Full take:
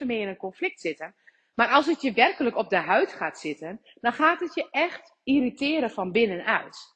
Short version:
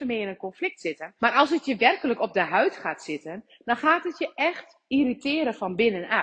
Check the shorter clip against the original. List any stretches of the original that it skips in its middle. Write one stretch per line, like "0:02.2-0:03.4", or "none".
0:01.2-0:01.5